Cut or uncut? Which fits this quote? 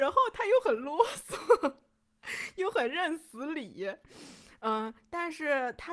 uncut